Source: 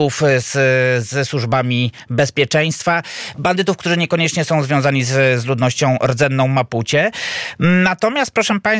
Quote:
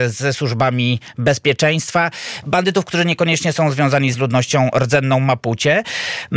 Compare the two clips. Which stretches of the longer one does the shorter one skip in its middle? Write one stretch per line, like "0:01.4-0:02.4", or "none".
0:05.1-0:05.4